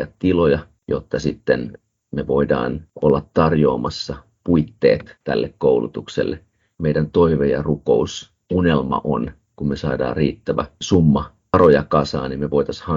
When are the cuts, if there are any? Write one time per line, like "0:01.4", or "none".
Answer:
0:06.7
0:09.5